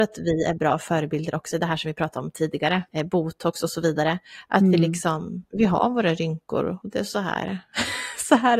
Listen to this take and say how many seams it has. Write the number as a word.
one